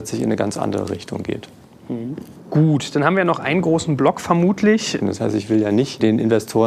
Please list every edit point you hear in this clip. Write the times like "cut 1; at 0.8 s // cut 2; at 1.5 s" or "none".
cut 1; at 5.0 s